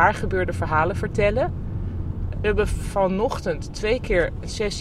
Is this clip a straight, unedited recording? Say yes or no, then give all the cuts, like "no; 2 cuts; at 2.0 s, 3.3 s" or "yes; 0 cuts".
no; 1 cut; at 2.3 s